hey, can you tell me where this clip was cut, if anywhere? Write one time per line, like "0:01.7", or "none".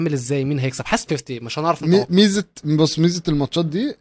0:01.1